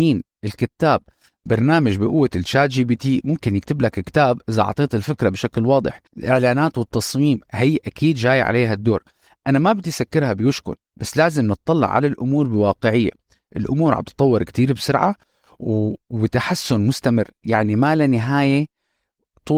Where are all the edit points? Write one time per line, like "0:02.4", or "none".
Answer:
0:06.1